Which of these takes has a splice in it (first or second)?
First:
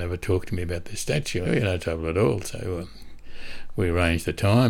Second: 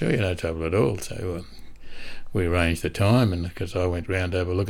first